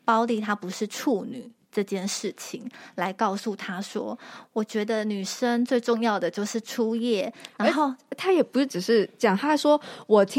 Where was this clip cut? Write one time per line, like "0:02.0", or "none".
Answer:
none